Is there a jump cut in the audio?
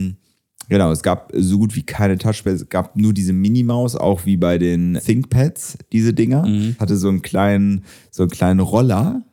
yes; 2 cuts; at 5.0 s, 6.8 s

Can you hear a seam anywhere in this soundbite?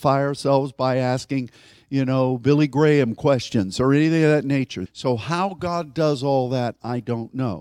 yes; 1 cut; at 4.9 s

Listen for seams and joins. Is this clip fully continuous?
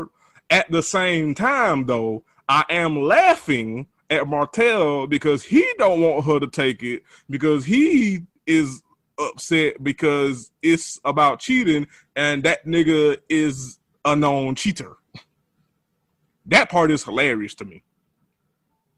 yes; 0 cuts

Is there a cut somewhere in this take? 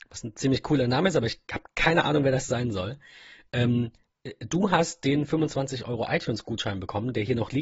no; 0 cuts

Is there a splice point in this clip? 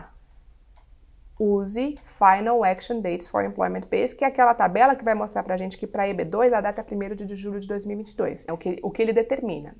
yes; 1 cut; at 8.5 s

